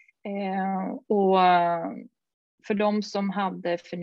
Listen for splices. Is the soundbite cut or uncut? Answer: uncut